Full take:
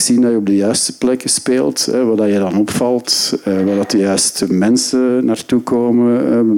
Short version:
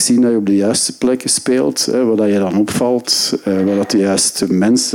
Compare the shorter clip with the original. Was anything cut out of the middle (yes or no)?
no